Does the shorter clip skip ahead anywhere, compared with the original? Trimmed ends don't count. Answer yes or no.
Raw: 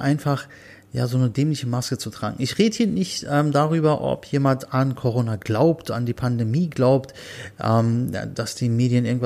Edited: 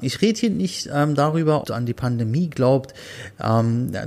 yes